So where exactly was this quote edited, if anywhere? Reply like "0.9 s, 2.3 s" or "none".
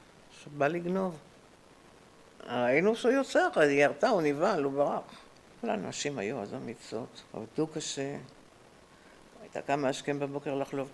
5.6 s, 7.3 s